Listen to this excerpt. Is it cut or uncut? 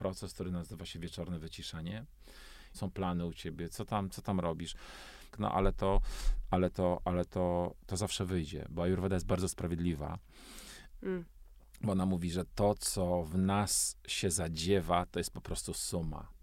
cut